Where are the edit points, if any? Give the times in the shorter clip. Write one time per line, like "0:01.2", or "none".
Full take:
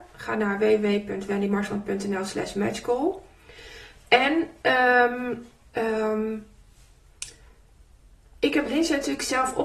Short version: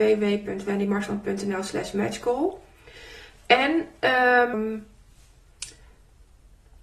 0:04.5